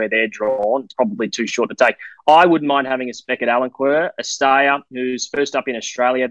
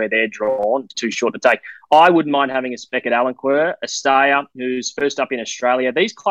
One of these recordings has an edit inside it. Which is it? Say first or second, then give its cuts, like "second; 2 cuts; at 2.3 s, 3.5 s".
second; 1 cut; at 0.9 s